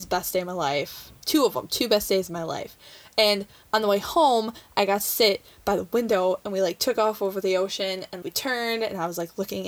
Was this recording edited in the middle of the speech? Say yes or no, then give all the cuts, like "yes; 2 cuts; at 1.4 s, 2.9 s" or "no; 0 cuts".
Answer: yes; 1 cut; at 8.2 s